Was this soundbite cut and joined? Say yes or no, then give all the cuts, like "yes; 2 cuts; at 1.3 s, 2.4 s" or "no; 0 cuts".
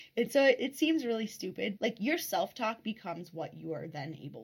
yes; 1 cut; at 1.8 s